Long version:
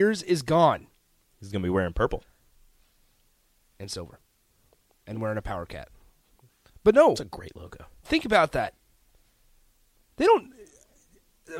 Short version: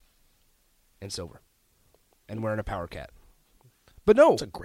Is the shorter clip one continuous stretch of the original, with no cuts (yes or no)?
yes